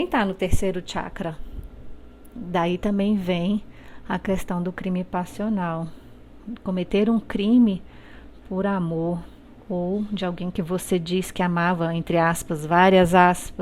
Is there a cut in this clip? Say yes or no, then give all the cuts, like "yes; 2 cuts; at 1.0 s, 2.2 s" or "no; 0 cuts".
no; 0 cuts